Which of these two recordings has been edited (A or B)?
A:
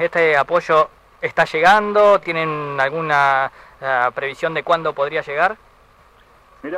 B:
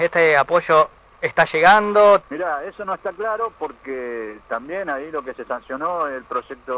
B